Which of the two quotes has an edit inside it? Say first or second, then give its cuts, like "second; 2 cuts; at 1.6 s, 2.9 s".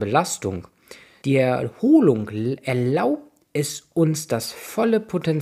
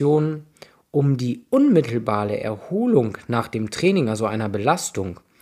first; 1 cut; at 1.2 s